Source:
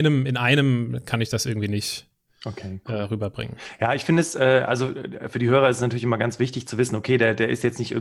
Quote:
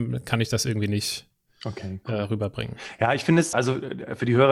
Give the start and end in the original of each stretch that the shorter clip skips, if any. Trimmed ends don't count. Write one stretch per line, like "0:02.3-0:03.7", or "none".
0:04.3-0:04.7